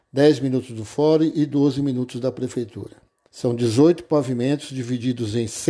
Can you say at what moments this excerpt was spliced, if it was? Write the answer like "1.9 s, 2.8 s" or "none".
3.3 s